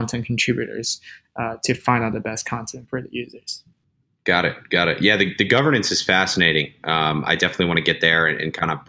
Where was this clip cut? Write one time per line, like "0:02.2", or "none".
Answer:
none